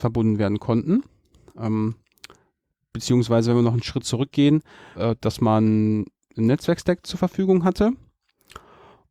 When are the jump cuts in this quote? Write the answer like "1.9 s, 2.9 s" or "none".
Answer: 4.9 s